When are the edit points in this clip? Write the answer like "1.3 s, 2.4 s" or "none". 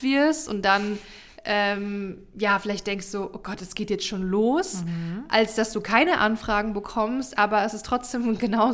none